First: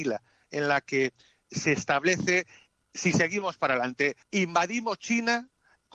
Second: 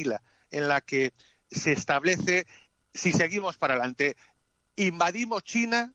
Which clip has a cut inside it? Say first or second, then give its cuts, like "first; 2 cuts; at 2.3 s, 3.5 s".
first; 1 cut; at 4.2 s